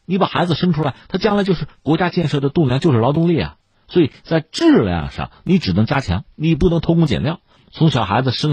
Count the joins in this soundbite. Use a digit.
2